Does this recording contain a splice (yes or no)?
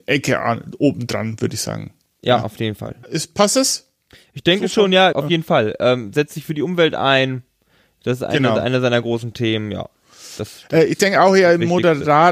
yes